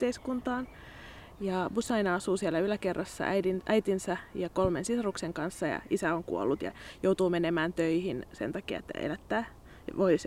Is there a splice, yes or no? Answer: yes